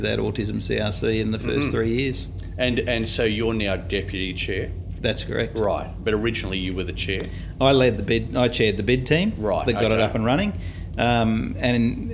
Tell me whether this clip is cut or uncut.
uncut